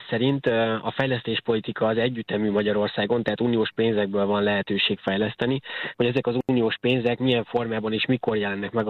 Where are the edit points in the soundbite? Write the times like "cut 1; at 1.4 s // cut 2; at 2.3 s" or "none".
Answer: cut 1; at 5.9 s